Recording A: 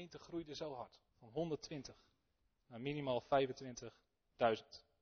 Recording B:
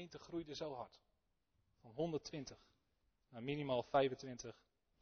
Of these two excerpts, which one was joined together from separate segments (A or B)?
A